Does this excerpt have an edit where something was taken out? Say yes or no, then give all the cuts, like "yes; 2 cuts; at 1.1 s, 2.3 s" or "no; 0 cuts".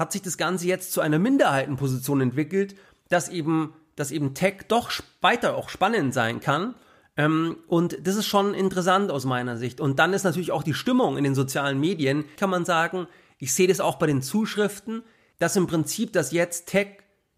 yes; 2 cuts; at 12.4 s, 15.3 s